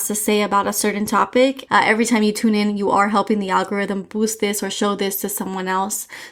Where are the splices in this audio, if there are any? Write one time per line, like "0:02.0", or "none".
0:01.7